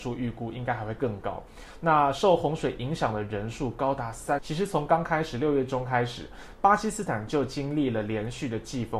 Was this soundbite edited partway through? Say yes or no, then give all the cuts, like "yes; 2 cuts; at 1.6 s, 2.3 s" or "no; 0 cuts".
yes; 1 cut; at 4.4 s